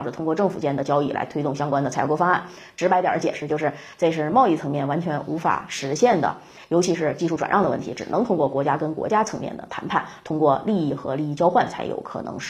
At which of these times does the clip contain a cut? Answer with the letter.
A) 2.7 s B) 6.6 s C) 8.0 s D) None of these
D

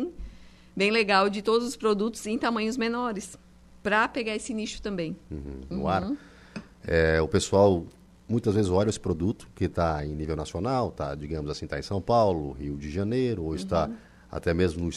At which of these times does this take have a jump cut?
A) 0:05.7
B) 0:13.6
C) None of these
A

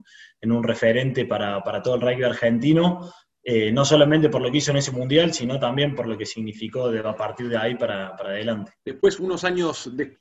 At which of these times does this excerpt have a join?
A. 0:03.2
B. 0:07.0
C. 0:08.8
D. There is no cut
C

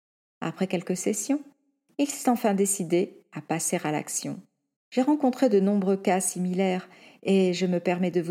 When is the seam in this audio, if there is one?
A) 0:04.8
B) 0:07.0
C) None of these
A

